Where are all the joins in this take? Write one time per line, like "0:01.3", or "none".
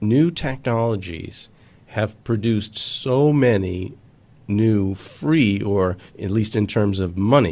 0:06.1